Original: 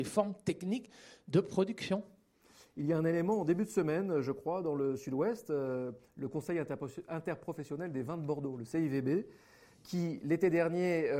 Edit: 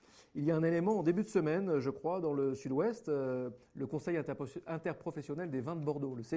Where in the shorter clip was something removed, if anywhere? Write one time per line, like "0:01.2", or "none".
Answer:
none

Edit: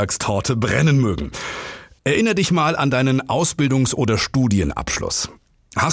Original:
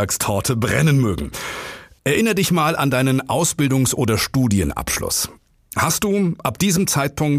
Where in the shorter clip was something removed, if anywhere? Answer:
none

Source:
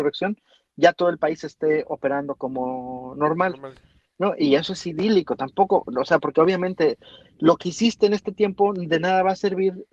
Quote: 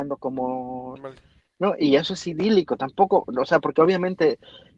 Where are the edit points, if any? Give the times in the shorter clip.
0:01.0

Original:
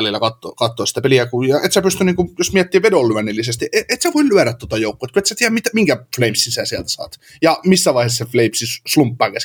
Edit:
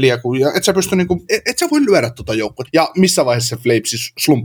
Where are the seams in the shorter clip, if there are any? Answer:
0:01.3
0:02.7

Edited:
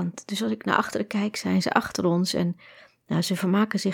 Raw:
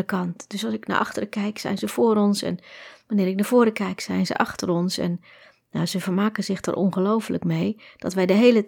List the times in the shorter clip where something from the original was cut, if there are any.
0:01.3

